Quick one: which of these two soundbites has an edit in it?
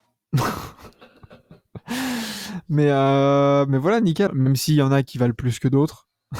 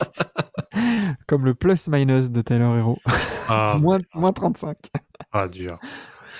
first; 1 cut; at 4.3 s

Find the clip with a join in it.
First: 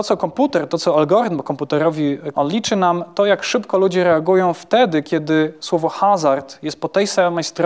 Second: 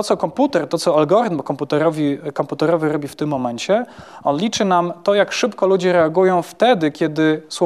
first; 1 cut; at 2.3 s

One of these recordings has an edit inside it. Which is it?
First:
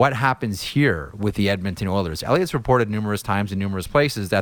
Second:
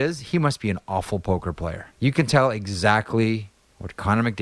second; 1 cut; at 1.9 s

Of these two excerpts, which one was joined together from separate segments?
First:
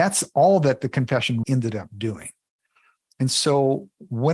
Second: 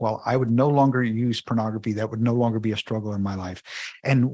first; 1 cut; at 1.4 s

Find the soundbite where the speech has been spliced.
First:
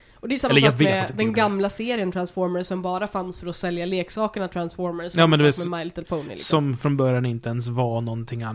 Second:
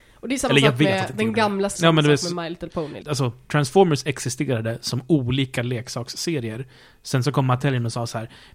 second; 2 cuts; at 1.7 s, 3.0 s

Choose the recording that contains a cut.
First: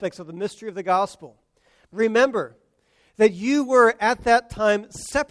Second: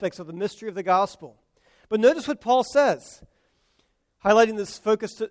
first; 1 cut; at 1.9 s

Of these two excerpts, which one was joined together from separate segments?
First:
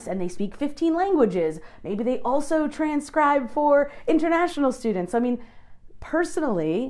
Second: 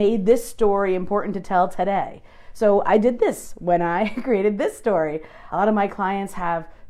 second; 1 cut; at 5.5 s

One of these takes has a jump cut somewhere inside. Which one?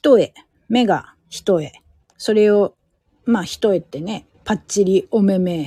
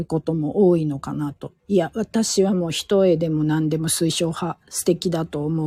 first; 2 cuts; at 2.0 s, 4.3 s

